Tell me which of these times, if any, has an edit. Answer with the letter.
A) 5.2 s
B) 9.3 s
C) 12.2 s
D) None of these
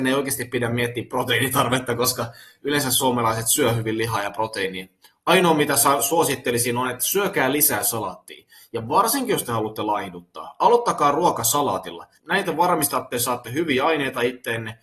C